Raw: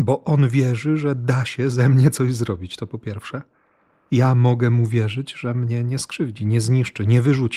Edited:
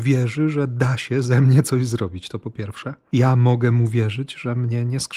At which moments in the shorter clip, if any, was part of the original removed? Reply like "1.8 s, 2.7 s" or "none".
3.0 s